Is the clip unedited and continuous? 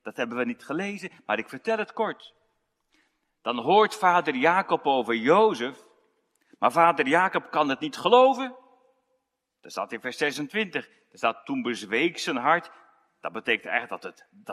yes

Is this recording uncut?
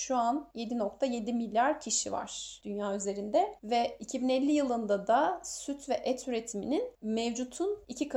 no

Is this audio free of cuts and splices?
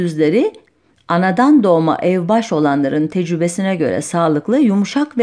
yes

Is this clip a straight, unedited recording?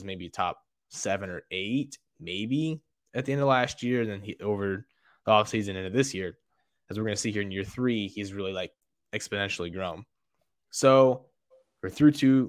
yes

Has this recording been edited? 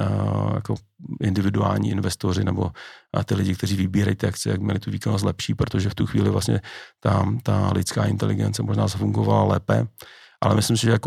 no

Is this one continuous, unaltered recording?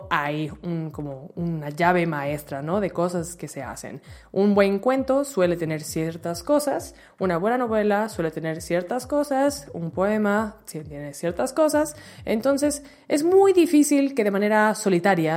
yes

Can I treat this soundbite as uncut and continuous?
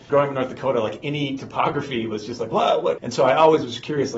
no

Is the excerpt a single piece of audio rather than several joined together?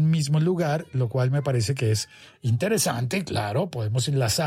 yes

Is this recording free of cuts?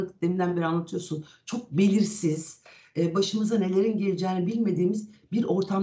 yes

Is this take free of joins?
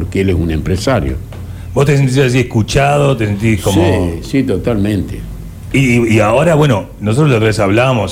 yes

